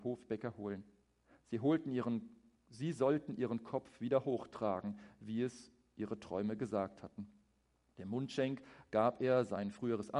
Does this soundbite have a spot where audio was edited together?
no; 0 cuts

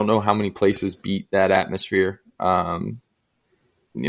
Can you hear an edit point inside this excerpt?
no; 0 cuts

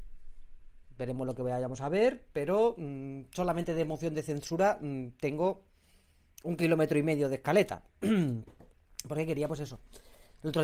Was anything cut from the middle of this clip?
no; 0 cuts

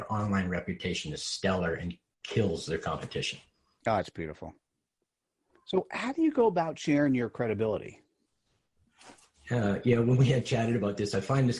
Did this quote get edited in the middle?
no; 0 cuts

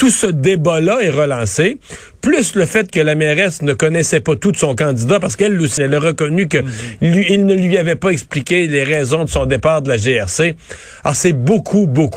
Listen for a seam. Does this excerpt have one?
yes; 1 cut; at 5.8 s

